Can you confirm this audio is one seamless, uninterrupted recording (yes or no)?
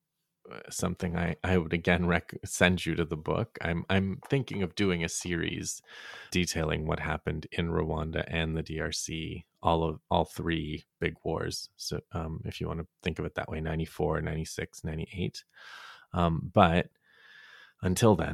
no